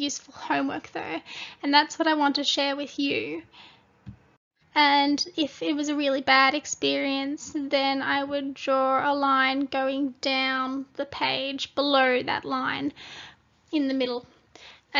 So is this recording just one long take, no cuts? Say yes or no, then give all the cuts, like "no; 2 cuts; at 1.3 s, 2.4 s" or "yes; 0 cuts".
no; 1 cut; at 4.6 s